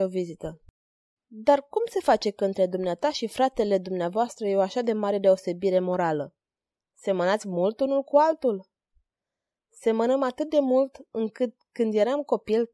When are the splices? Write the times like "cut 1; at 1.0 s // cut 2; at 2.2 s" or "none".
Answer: cut 1; at 1.2 s // cut 2; at 6.8 s